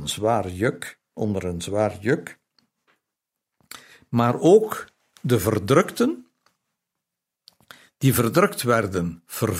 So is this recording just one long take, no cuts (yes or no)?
yes